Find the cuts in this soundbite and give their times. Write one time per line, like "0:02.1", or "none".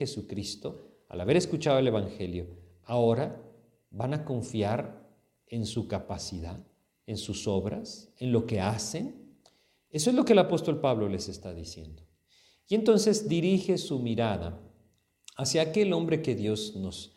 none